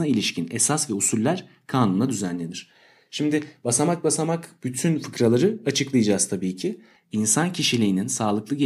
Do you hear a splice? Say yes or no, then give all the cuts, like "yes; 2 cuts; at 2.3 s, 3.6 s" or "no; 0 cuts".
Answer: yes; 1 cut; at 7.0 s